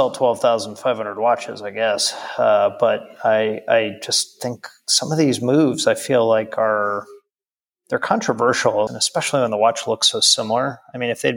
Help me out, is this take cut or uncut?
cut